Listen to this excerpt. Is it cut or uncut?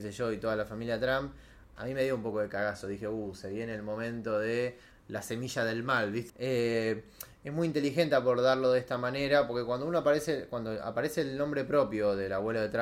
cut